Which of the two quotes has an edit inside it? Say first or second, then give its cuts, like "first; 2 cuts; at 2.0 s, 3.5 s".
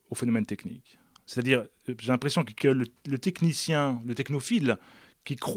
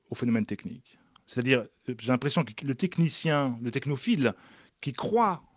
second; 1 cut; at 2.6 s